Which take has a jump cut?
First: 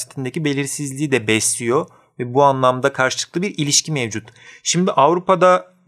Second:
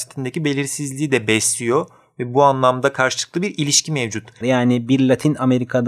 second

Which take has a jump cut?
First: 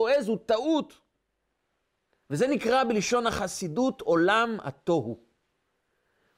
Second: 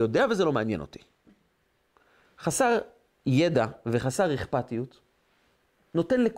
first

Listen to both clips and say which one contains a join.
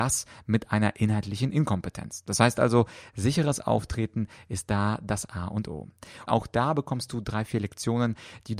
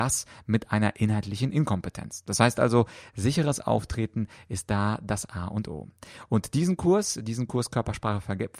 first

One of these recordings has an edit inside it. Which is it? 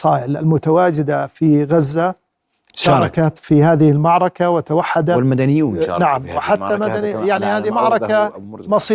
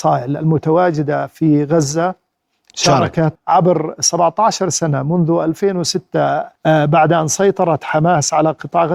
second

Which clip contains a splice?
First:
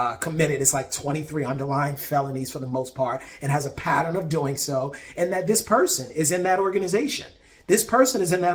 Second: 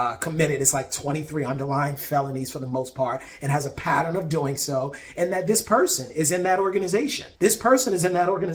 second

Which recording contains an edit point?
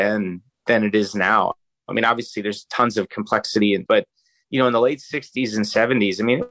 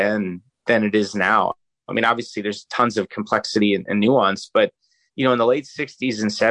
first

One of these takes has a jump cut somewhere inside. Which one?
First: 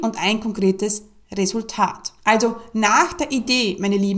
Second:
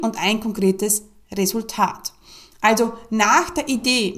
first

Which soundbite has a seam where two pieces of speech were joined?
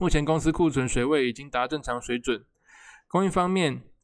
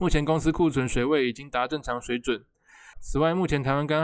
second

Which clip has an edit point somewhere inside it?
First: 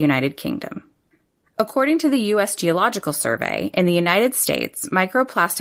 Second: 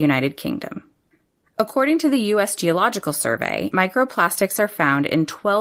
second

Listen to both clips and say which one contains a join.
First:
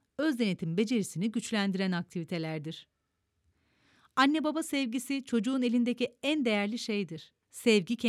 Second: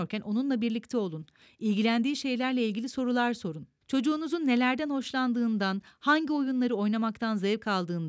second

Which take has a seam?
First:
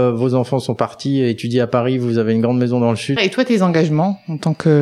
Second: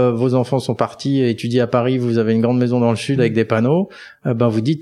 first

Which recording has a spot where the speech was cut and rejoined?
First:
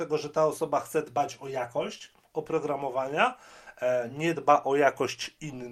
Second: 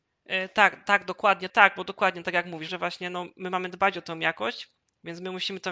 second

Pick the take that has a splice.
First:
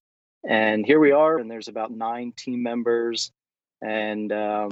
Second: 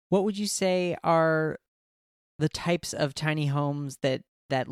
first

